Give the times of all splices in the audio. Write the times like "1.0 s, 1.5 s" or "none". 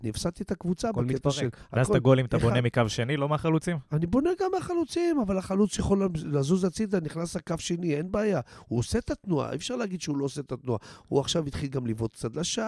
none